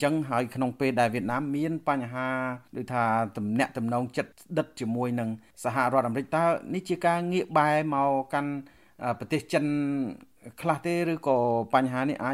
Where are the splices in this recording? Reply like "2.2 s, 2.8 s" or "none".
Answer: none